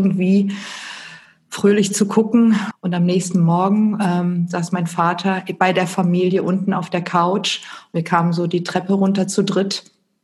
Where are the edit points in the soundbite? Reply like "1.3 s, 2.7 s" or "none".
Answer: 2.7 s